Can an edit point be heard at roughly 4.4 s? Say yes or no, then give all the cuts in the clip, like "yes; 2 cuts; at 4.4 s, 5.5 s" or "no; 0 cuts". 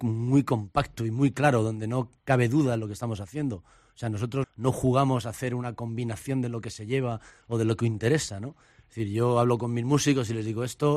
yes; 1 cut; at 4.4 s